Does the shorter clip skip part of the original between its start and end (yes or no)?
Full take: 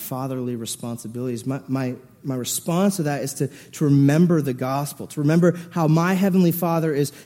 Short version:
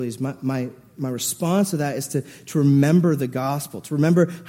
no